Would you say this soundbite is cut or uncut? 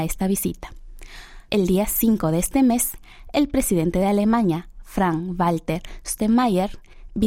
cut